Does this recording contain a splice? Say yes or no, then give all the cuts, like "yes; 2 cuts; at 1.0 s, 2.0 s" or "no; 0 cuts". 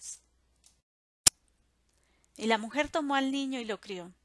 yes; 1 cut; at 2.3 s